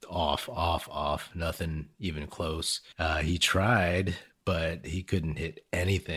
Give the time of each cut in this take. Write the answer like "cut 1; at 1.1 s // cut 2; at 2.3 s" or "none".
cut 1; at 2.9 s